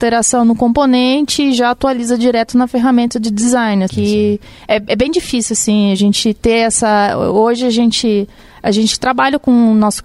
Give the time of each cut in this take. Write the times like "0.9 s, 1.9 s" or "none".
3.9 s

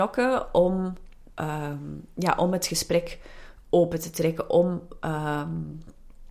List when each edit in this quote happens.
1.3 s

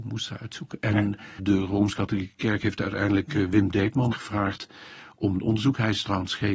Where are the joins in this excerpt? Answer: 1.4 s, 4.1 s

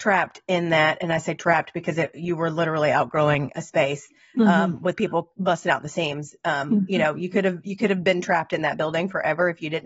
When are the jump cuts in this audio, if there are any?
none

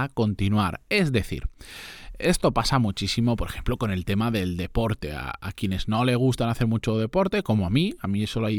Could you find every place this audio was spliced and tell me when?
none

